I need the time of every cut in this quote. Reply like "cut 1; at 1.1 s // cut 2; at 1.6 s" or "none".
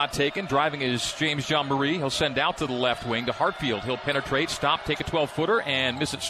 none